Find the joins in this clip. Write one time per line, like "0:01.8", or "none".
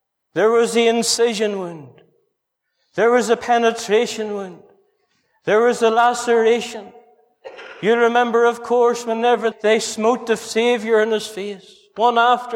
0:09.5